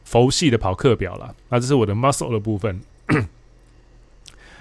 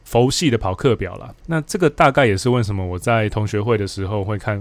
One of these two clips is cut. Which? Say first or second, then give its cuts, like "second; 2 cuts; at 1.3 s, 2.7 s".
second; 1 cut; at 1.4 s